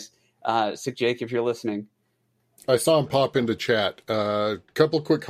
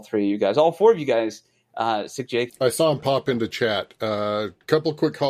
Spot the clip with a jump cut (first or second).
second